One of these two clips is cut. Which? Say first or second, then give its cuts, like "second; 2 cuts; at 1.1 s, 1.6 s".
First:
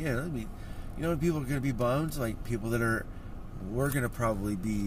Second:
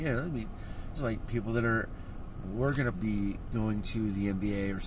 second; 2 cuts; at 0.9 s, 2.9 s